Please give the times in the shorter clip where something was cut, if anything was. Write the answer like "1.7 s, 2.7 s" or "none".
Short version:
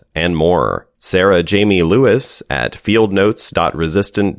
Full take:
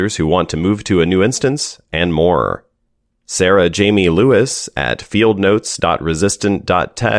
1.0 s